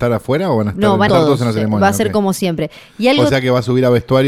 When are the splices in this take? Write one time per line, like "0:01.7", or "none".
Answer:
0:01.1